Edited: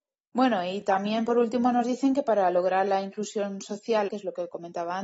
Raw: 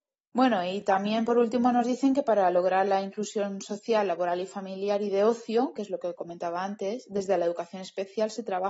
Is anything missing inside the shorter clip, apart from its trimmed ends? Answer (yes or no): yes